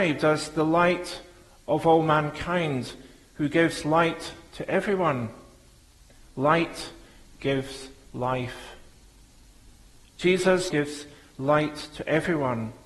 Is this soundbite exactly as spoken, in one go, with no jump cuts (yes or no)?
no